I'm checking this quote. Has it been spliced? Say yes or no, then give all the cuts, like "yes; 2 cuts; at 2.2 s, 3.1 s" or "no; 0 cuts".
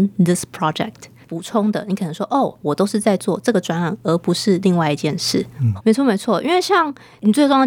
yes; 2 cuts; at 1.2 s, 5.8 s